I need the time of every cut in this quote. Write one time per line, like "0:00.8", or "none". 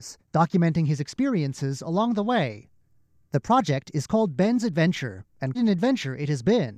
0:05.5